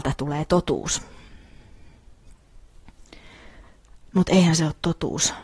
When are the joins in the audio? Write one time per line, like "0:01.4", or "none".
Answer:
none